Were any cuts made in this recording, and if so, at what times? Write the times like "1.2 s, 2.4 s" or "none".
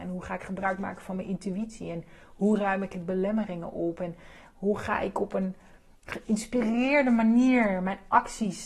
none